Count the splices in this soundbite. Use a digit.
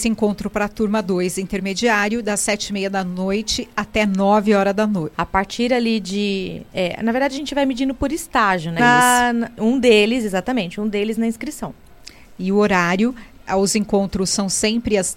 2